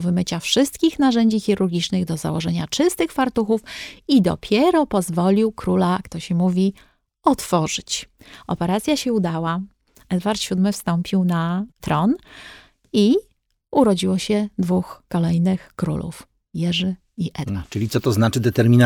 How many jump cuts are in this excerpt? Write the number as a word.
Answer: one